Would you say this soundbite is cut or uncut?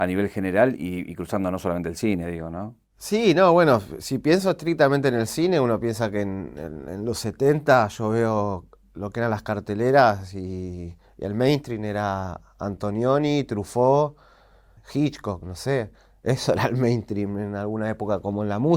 cut